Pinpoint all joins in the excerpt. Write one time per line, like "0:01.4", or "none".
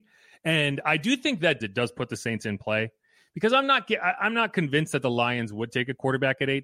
0:01.6